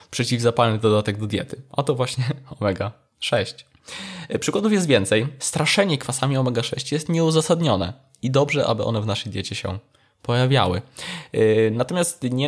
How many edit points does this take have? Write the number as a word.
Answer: one